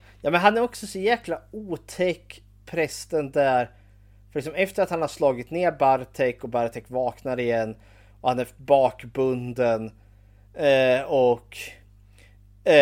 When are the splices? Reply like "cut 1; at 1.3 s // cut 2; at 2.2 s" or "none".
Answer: none